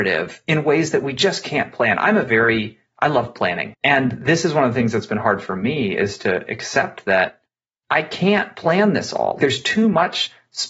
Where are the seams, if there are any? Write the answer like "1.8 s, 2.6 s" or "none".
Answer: 3.7 s